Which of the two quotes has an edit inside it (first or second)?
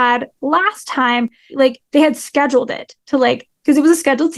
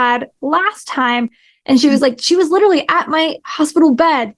first